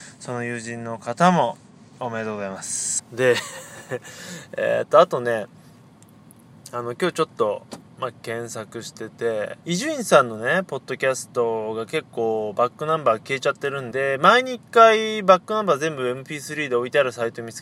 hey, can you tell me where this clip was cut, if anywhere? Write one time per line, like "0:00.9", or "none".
0:03.0
0:09.6
0:13.9